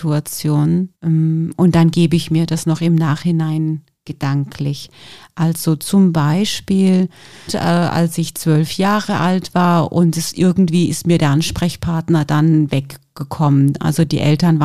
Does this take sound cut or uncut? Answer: cut